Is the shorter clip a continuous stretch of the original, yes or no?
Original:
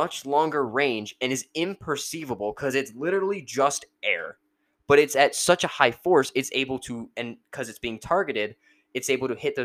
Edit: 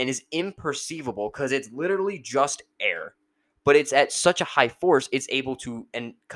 yes